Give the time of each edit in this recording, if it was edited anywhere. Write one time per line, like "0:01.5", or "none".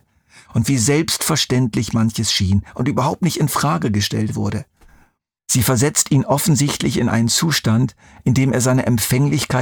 0:05.4